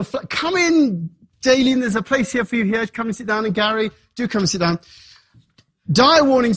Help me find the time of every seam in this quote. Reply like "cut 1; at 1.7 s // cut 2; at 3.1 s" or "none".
none